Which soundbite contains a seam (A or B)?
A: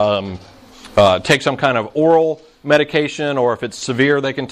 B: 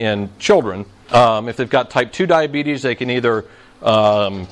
B